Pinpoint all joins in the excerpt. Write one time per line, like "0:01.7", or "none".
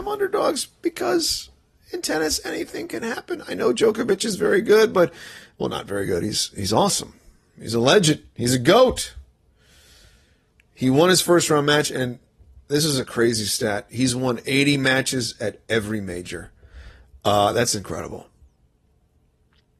none

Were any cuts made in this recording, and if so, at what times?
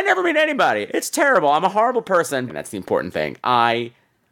0:02.5

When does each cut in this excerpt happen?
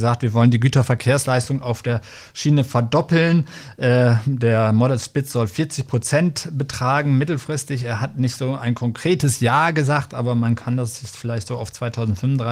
none

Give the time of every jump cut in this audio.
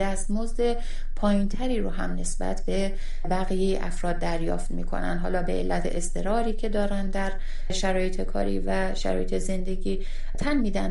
none

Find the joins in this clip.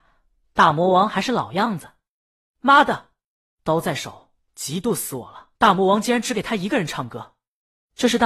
0:04.4
0:05.6

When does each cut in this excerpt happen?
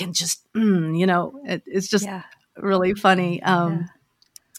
none

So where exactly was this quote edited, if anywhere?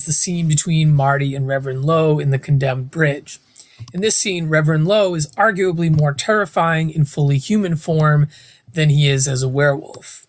none

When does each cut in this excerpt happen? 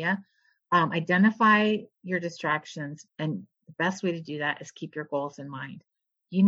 0:03.1

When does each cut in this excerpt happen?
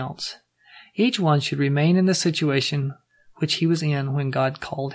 none

